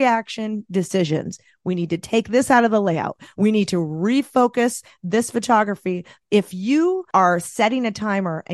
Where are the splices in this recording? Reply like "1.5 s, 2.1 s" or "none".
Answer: 3.3 s, 6.2 s